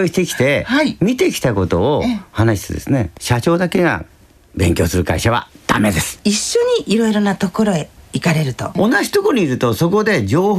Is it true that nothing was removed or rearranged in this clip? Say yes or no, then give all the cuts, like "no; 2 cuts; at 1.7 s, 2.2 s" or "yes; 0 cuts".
yes; 0 cuts